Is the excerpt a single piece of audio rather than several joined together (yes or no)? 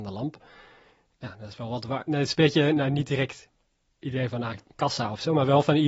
yes